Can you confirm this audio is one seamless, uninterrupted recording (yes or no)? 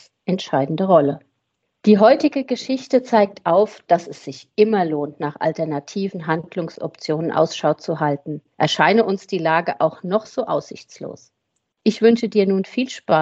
yes